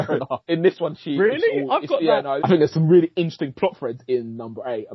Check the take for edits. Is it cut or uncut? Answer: cut